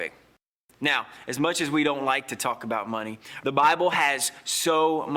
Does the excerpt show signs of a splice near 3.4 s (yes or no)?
yes